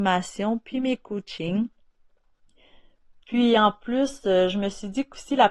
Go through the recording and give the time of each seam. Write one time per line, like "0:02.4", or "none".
none